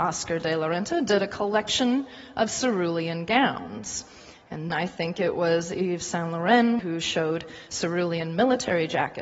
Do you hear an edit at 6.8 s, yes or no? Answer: yes